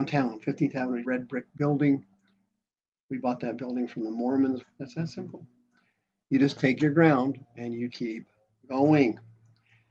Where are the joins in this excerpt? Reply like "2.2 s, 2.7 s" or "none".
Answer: 1.0 s, 4.6 s, 7.9 s